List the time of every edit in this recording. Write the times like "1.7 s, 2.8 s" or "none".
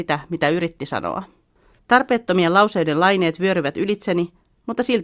1.8 s